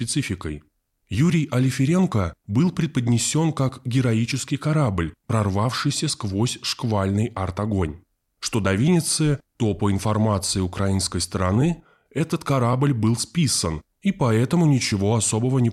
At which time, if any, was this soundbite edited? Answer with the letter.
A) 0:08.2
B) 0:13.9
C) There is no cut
B